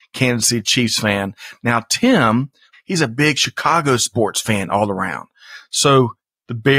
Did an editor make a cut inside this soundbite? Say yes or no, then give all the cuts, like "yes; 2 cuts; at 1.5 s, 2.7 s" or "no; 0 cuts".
yes; 1 cut; at 2.7 s